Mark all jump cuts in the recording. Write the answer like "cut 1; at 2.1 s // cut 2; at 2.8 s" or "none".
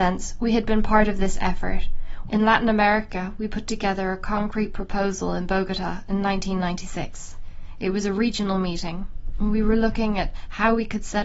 cut 1; at 2.3 s